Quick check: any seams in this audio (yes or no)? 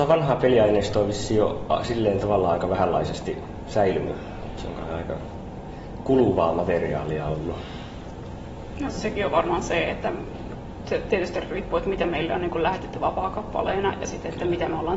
no